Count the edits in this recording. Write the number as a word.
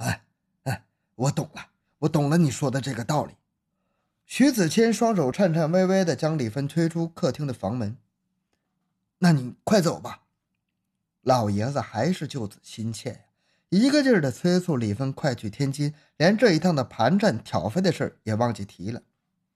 zero